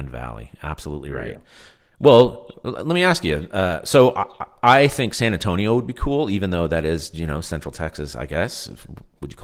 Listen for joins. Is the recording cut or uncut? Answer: uncut